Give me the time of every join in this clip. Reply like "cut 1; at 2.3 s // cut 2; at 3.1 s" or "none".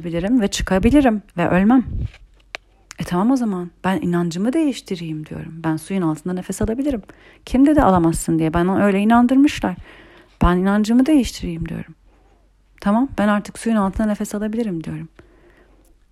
cut 1; at 1.3 s